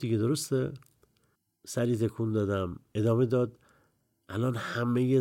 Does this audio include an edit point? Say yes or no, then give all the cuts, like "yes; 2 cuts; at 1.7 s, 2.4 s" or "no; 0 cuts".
no; 0 cuts